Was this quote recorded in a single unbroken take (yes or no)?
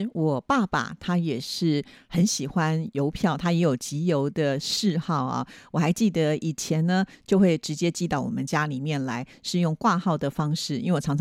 no